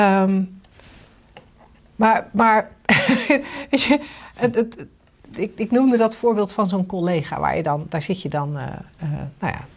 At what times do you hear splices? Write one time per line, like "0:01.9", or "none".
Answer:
0:04.5

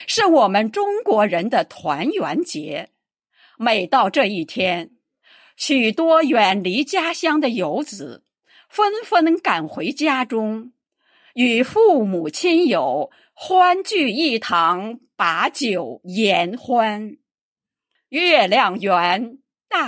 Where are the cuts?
0:18.0

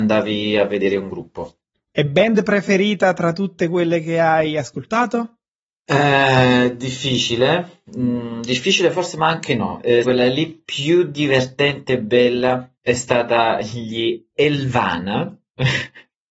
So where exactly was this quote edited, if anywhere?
0:10.0
0:12.8

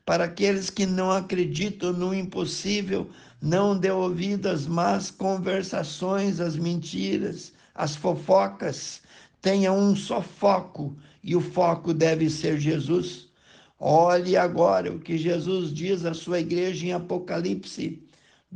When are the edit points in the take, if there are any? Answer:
none

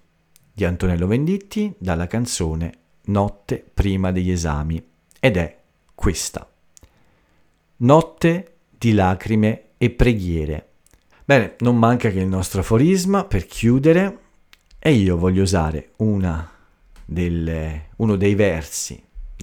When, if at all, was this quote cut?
0:11.1

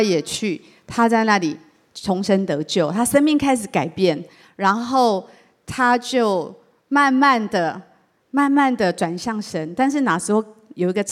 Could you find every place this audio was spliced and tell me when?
none

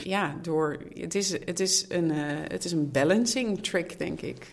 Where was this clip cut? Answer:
none

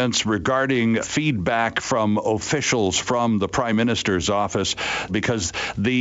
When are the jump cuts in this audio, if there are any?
0:01.0
0:05.1

